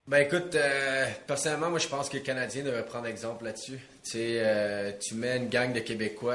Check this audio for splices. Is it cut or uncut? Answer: uncut